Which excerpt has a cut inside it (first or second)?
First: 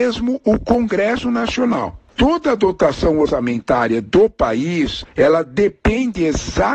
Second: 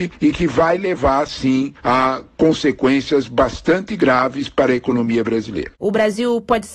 second